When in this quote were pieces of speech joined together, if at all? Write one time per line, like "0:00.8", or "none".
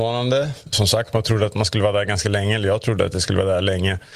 none